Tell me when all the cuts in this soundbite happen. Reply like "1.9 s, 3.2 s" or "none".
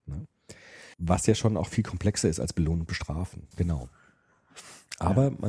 0.9 s, 3.5 s